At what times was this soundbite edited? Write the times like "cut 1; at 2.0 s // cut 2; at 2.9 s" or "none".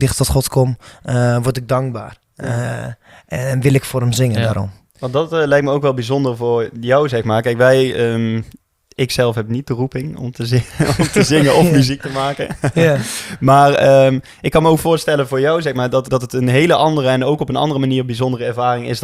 cut 1; at 16.1 s